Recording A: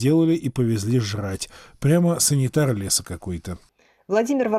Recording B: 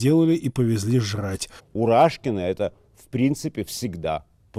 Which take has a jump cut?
B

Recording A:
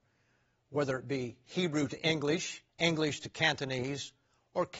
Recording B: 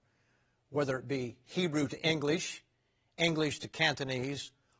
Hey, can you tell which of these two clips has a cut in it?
A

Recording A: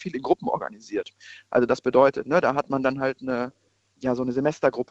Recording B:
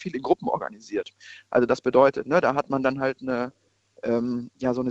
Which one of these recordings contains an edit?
A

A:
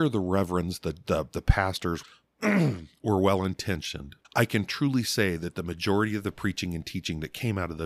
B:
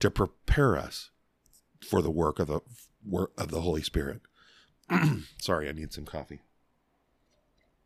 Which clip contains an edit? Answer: A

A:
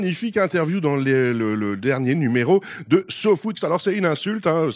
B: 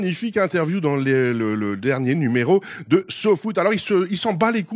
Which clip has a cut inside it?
A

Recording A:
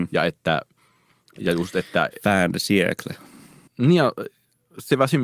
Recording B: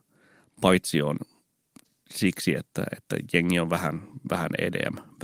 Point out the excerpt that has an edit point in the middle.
A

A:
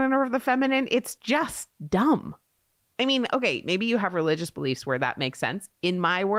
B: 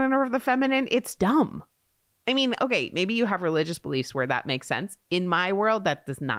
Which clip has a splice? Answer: B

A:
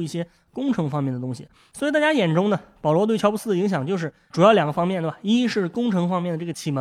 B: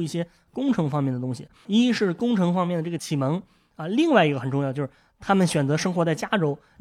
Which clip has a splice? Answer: B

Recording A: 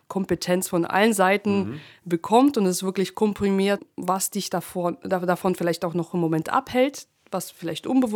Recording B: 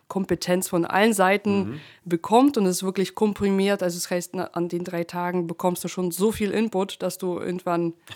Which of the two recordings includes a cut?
A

